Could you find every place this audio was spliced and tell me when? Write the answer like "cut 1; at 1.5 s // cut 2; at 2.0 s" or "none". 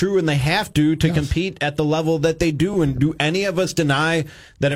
none